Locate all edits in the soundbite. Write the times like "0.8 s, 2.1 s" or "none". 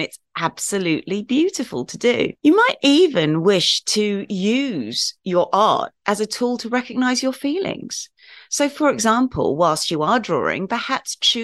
2.4 s